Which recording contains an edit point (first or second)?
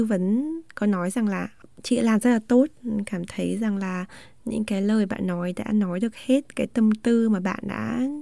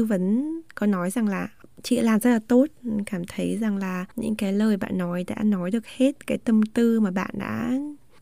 second